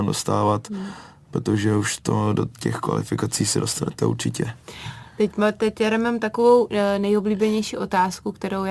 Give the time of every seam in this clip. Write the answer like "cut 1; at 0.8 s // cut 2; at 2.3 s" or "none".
none

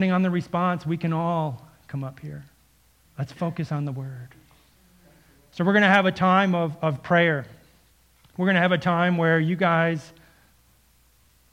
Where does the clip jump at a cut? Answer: cut 1; at 3.1 s

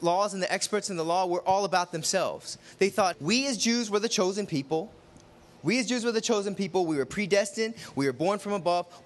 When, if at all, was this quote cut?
cut 1; at 3.1 s

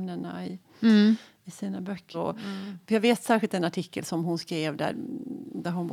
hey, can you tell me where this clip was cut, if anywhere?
cut 1; at 2.1 s

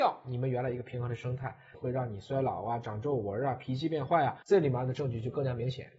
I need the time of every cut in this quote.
cut 1; at 1.7 s // cut 2; at 4.4 s

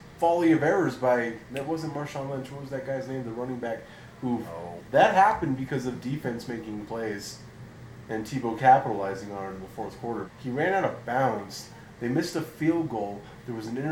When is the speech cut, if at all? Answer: cut 1; at 4.8 s // cut 2; at 10.3 s

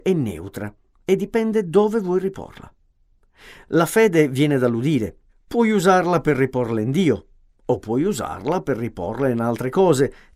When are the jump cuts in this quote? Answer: cut 1; at 5.3 s

